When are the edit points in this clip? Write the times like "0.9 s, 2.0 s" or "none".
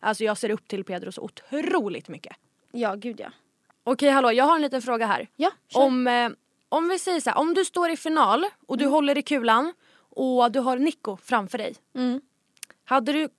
5.3 s